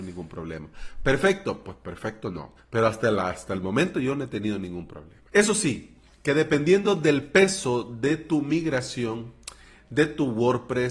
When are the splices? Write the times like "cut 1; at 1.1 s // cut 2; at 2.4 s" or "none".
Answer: cut 1; at 2.6 s // cut 2; at 5.3 s